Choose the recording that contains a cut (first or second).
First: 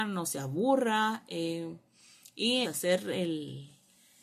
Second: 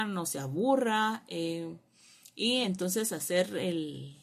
first